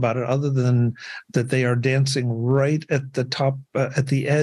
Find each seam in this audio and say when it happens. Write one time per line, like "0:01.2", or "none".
none